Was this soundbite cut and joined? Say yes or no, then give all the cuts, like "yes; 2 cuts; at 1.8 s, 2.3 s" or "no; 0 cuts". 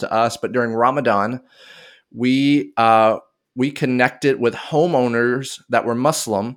no; 0 cuts